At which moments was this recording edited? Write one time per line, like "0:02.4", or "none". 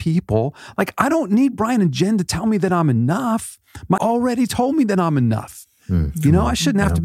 0:04.0